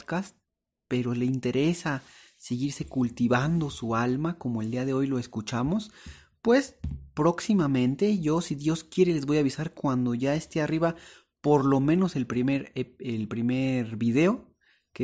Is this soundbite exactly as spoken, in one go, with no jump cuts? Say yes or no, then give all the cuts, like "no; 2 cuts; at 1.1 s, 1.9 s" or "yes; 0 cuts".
yes; 0 cuts